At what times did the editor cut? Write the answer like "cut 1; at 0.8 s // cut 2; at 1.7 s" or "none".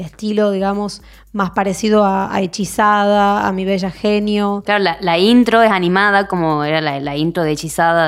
none